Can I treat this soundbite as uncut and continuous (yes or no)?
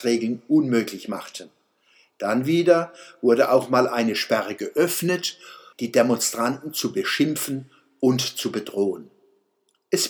no